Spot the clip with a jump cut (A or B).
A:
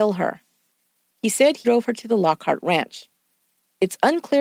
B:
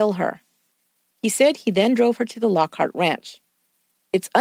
A